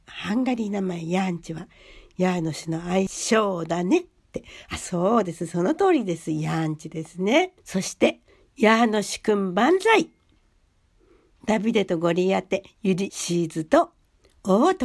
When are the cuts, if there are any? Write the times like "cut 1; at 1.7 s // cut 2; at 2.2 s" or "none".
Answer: none